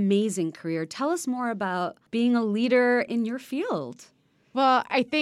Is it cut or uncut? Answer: cut